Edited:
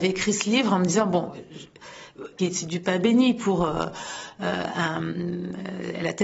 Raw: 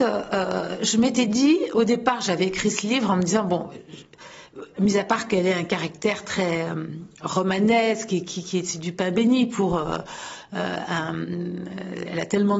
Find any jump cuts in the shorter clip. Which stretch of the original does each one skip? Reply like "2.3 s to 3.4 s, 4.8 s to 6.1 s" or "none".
4.8 s to 8.5 s